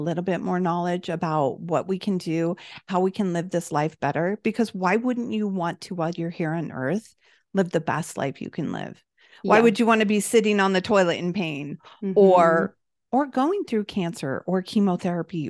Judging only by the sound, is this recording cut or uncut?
uncut